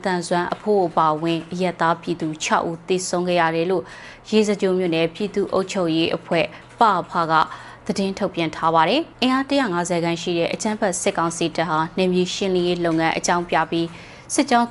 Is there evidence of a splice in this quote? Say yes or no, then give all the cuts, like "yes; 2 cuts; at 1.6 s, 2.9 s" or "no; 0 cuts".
yes; 1 cut; at 9.1 s